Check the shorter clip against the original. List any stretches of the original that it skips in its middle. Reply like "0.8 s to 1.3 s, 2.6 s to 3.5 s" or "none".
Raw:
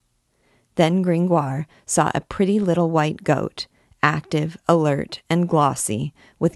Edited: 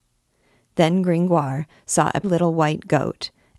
2.2 s to 2.6 s